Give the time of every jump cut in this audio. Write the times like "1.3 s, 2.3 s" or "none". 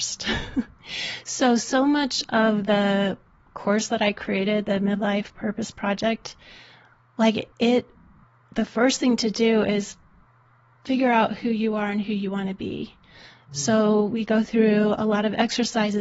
7.5 s